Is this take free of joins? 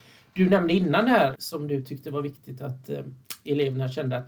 no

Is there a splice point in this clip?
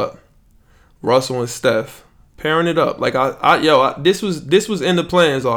no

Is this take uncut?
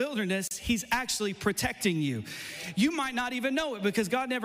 yes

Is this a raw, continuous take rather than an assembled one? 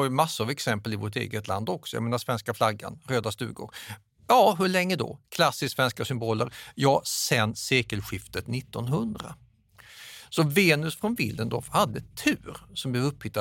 yes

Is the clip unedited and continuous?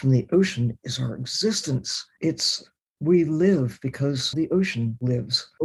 no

